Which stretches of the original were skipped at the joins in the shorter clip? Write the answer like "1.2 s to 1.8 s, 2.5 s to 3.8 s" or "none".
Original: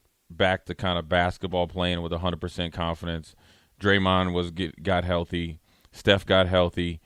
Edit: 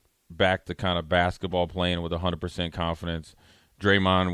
none